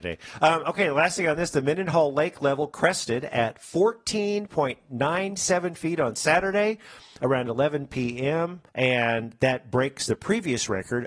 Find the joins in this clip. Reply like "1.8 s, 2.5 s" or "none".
8.7 s